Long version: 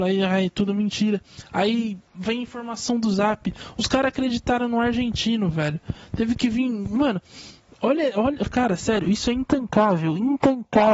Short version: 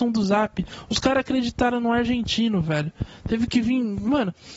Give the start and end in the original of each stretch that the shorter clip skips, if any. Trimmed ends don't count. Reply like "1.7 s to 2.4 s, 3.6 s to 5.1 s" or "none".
none

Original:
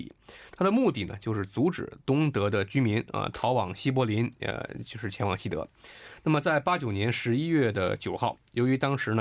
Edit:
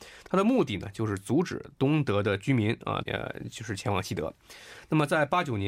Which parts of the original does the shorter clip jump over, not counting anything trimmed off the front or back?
3.3 s to 4.4 s

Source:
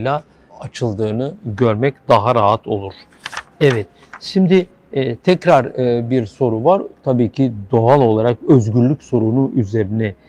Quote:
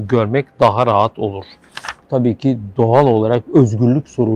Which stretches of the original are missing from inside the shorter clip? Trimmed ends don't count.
3.5 s to 6.9 s

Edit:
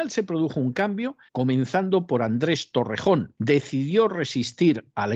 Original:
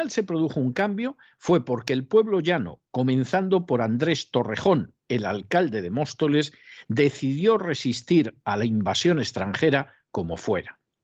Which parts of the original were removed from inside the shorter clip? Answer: 1.3 s to 2.9 s, 5.0 s to 6.9 s

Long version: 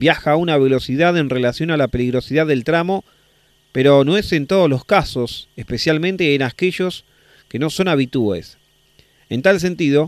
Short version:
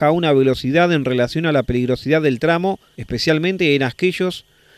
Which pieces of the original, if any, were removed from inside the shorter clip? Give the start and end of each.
3.2 s to 5.5 s

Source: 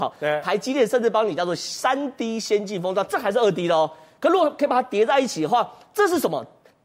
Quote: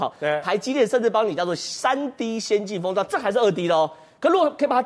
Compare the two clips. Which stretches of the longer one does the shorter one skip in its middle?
none

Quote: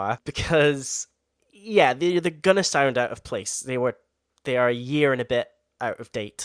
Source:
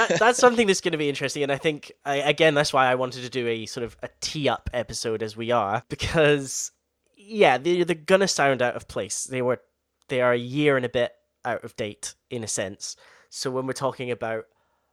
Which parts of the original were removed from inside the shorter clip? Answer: none

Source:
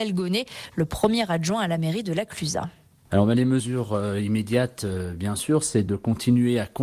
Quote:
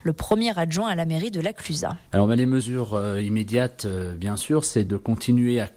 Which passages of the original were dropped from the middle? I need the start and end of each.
2.8 s to 3.1 s

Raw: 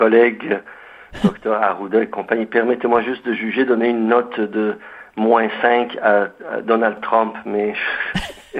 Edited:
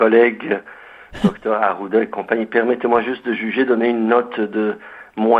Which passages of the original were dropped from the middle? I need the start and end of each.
none

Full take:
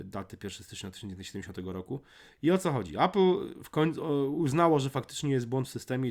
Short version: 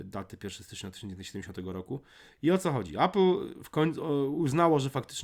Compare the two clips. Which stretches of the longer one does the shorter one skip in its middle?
none

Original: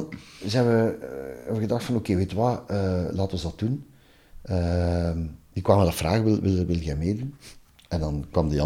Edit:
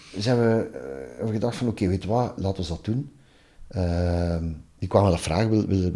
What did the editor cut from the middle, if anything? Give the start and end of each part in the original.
2.7 s to 3.1 s

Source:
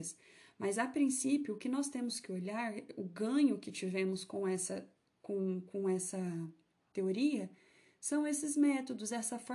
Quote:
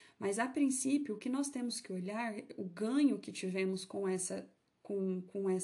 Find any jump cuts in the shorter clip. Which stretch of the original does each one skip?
none

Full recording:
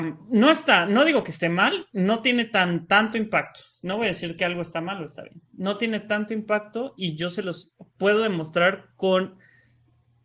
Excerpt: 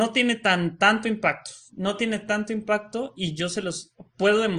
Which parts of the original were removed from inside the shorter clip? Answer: 3.8 s to 5.5 s

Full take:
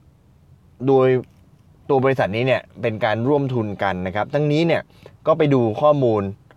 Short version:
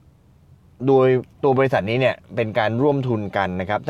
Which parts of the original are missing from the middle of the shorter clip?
1.3 s to 1.8 s

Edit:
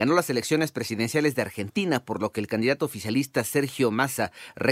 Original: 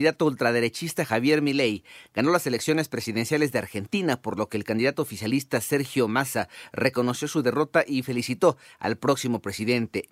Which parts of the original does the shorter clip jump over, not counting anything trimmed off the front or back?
none

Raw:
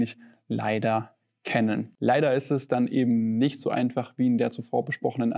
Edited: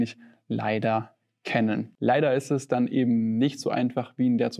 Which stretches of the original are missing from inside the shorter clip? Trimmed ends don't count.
none

